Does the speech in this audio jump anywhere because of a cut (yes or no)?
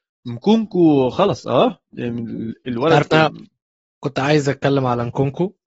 no